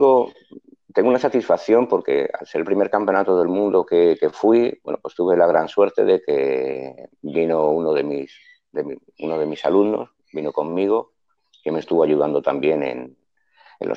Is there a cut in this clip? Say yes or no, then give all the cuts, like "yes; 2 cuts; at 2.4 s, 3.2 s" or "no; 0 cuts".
no; 0 cuts